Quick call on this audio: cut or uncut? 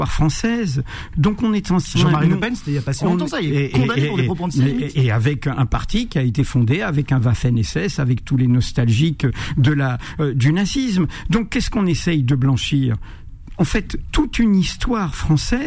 cut